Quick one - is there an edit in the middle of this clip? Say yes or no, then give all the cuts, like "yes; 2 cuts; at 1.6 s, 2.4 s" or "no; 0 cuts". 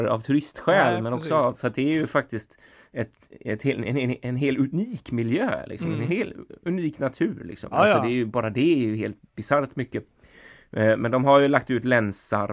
yes; 1 cut; at 7.7 s